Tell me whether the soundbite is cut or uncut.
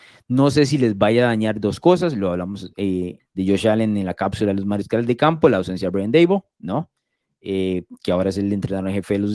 cut